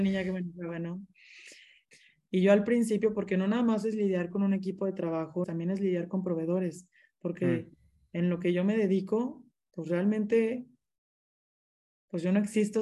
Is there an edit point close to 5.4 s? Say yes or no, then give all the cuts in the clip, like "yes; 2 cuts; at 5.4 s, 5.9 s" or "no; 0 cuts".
yes; 1 cut; at 5.4 s